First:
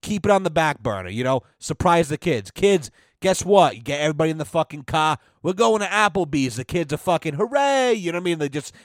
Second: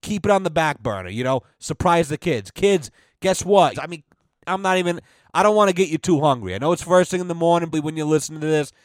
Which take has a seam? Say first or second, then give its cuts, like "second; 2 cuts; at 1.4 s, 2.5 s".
second; 2 cuts; at 3.7 s, 7.7 s